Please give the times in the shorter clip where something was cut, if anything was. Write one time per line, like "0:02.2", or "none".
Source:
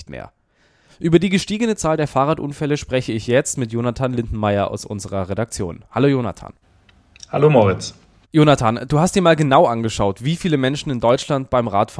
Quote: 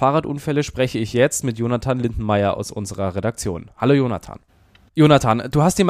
0:04.9